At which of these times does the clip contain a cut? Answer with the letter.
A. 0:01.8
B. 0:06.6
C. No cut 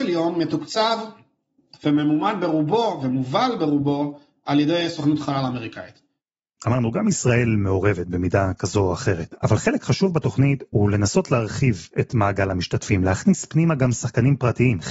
B